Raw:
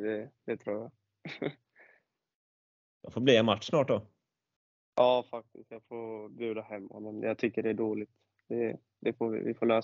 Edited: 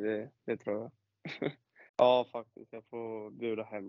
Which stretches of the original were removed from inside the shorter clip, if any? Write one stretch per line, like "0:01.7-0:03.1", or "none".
0:01.9-0:04.9